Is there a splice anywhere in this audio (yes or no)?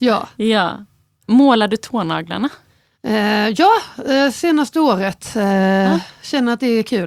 no